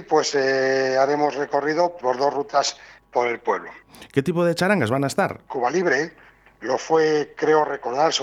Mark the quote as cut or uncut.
cut